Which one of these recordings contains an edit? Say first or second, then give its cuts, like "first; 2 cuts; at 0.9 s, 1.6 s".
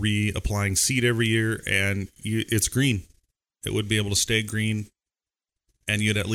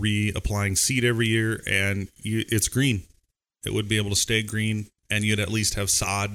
second; 1 cut; at 5.0 s